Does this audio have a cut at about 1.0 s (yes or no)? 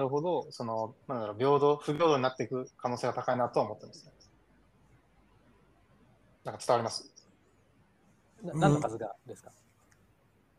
yes